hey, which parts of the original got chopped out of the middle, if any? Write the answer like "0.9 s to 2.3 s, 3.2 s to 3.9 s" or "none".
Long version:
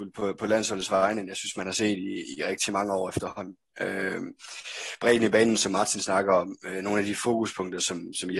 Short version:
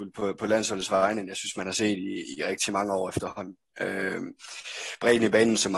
none